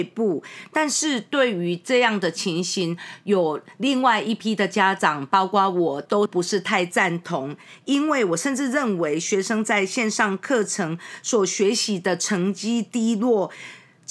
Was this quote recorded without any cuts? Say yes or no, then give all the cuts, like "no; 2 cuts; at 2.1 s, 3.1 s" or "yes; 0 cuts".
yes; 0 cuts